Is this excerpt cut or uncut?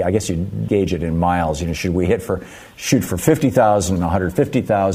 cut